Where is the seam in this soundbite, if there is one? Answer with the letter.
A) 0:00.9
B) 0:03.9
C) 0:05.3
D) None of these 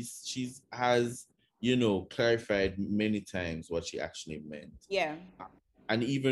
D